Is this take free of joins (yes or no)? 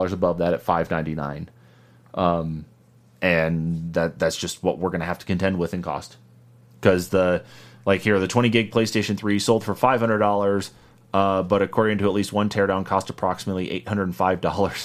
yes